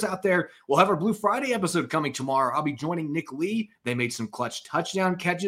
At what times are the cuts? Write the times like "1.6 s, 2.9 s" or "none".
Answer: 3.7 s